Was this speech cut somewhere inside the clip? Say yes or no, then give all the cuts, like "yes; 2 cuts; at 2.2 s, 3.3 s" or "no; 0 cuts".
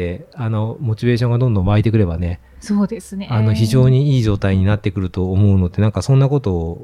no; 0 cuts